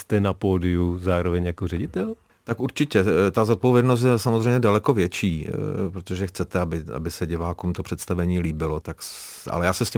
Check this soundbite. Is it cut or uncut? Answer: cut